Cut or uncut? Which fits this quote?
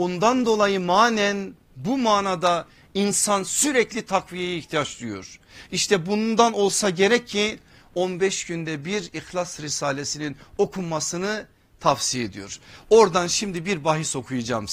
uncut